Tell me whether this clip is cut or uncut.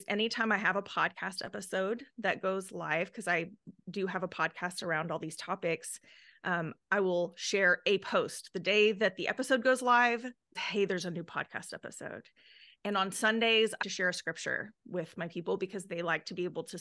cut